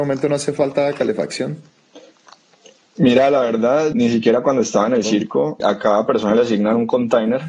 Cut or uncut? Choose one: cut